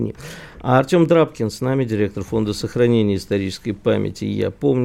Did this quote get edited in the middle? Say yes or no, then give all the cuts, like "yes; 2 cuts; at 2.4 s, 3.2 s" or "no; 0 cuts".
no; 0 cuts